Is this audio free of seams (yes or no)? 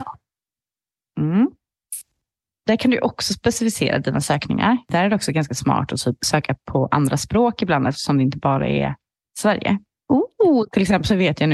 yes